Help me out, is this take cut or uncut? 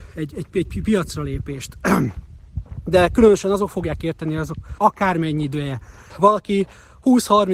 cut